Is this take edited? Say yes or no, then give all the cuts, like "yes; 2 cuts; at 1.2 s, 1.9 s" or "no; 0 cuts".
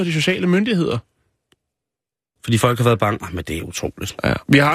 yes; 1 cut; at 2.4 s